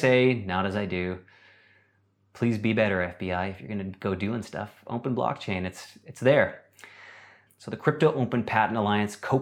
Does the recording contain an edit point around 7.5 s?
yes; 1 cut; at 7.5 s

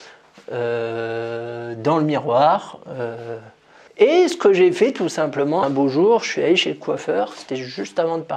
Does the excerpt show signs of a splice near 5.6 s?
yes; 2 cuts; at 3.9 s, 5.6 s

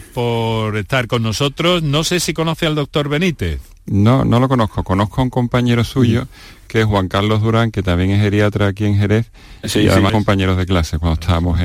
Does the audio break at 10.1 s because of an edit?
yes; 1 cut; at 10.1 s

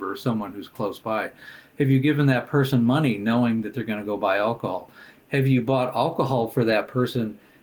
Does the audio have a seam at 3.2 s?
no; 0 cuts

